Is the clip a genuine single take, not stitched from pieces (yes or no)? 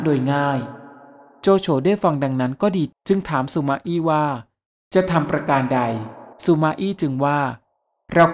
no